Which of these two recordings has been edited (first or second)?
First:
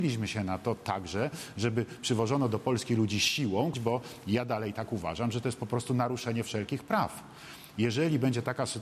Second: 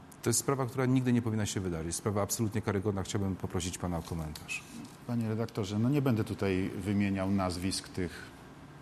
first